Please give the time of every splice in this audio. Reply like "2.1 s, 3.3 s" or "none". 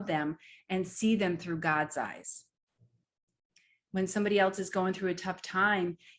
3.9 s